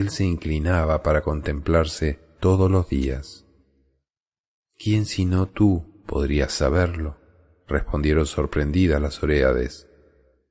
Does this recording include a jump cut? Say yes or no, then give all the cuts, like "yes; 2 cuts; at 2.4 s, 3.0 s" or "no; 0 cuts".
yes; 1 cut; at 4.6 s